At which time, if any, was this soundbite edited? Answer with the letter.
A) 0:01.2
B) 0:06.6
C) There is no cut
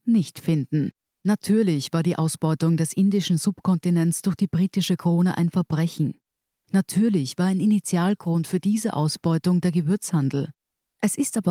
A